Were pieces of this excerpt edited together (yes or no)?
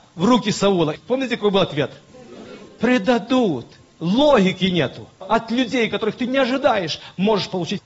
yes